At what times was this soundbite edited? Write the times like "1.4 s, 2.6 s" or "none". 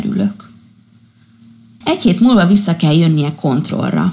1.8 s